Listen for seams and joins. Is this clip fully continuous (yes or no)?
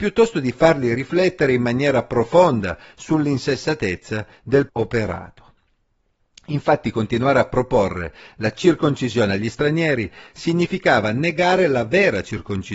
no